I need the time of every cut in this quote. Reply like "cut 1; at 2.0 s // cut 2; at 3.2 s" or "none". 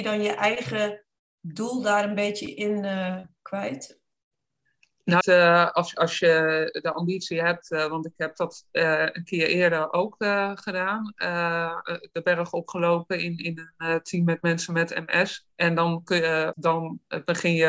cut 1; at 5.2 s // cut 2; at 15.5 s // cut 3; at 16.5 s